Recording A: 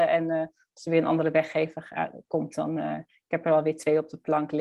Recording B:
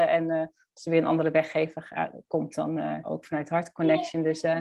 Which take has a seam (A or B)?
B